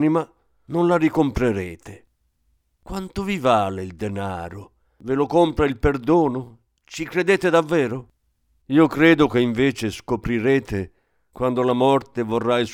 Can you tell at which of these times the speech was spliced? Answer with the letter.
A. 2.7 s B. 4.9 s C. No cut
A